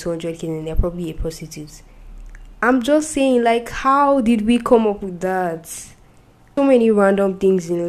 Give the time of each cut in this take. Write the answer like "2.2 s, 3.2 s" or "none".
6.6 s